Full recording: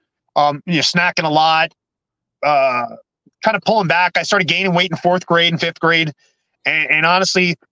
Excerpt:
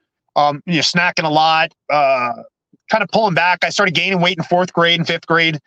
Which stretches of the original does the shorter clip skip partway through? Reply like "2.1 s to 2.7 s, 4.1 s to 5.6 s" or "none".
1.8 s to 2.3 s